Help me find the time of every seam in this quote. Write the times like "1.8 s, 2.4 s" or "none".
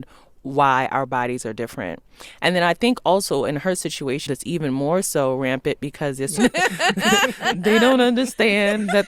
4.3 s, 6.4 s